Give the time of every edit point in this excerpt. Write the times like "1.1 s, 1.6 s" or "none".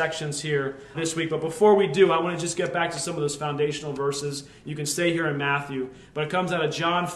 0.9 s